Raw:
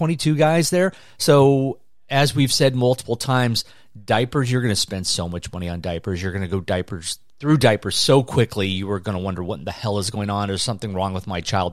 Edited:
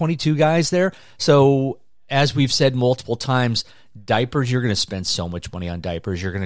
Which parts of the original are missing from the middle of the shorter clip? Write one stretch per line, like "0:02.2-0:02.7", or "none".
none